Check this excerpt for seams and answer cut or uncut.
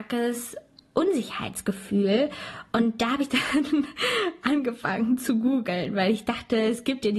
uncut